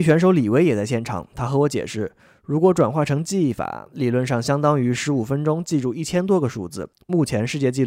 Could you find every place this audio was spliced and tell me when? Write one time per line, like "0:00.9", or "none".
0:06.9

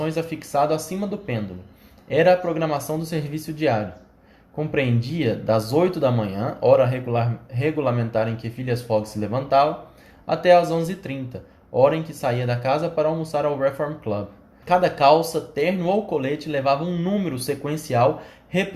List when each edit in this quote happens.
0:14.6

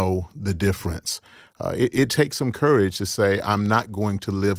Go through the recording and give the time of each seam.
none

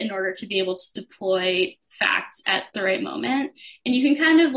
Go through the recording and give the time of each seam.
0:02.7

